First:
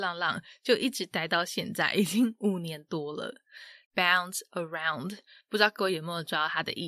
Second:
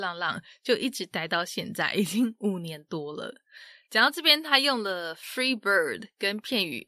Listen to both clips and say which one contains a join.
first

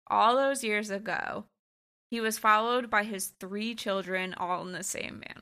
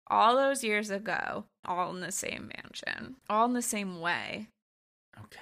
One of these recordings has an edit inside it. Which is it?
second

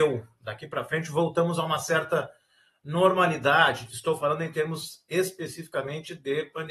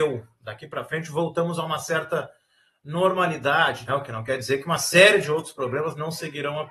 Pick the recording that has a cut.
second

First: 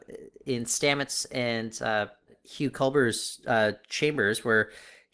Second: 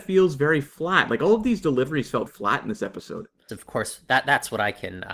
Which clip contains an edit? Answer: second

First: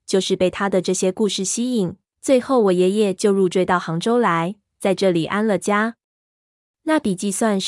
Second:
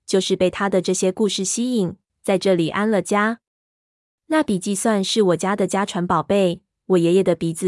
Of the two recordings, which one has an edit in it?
second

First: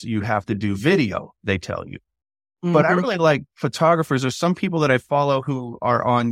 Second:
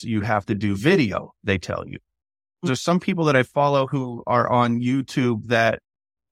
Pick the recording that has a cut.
second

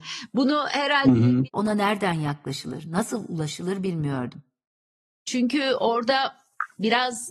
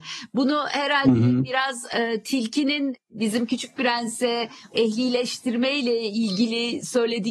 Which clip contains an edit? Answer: first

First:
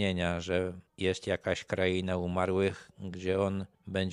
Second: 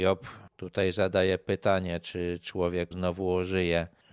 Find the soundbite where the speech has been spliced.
second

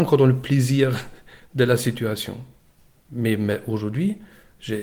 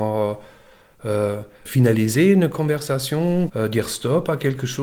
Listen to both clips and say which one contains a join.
second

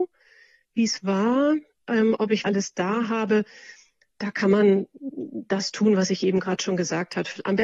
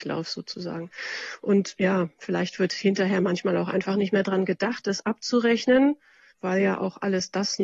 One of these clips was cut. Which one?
first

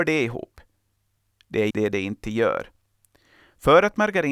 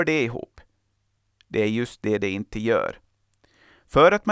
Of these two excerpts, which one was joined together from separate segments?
first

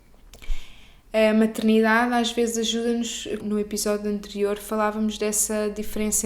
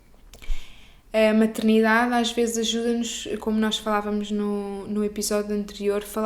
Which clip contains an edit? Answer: first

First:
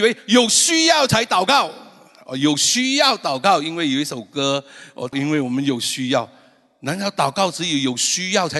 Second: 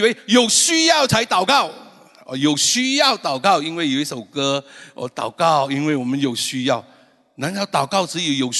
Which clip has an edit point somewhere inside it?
first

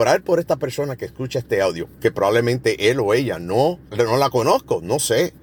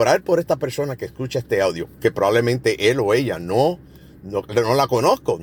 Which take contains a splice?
first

